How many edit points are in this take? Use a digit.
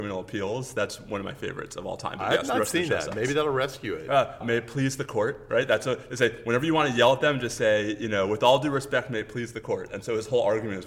1